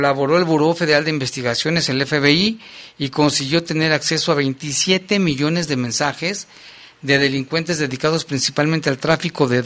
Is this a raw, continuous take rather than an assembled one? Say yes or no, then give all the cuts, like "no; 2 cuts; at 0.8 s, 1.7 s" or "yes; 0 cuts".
yes; 0 cuts